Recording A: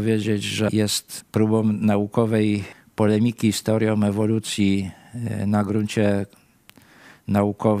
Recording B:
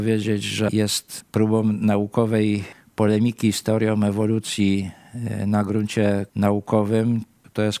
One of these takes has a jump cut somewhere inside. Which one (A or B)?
B